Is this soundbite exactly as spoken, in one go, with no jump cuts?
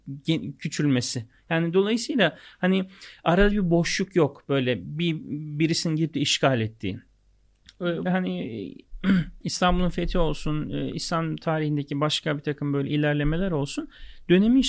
no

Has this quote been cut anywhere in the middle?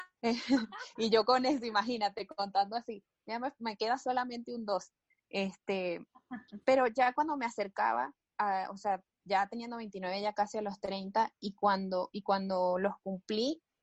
no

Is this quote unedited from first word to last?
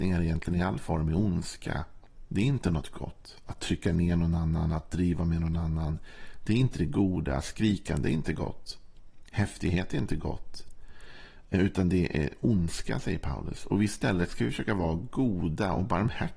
yes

